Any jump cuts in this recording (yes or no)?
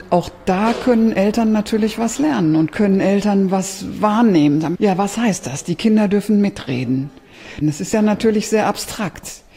yes